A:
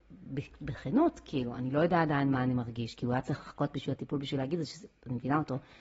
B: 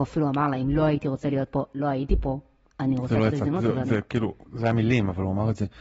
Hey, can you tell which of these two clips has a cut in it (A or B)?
B